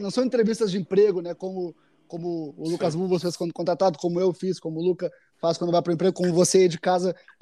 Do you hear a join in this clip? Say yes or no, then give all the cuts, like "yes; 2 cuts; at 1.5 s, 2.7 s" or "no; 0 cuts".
no; 0 cuts